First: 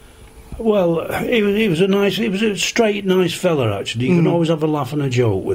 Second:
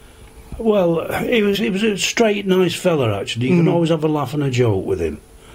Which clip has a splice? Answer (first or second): second